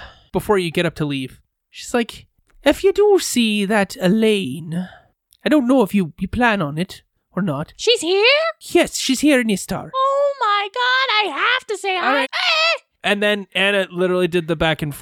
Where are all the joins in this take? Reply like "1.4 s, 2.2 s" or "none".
12.2 s